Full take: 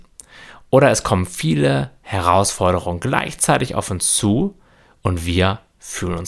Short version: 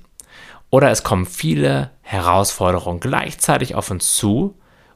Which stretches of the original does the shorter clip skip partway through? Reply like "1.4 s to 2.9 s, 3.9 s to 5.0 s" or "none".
none